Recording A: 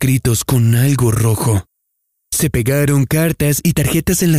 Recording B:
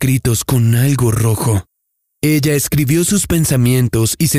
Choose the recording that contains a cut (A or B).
B